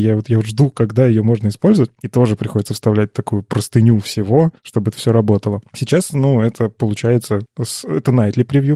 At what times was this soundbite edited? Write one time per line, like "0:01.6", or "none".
0:02.0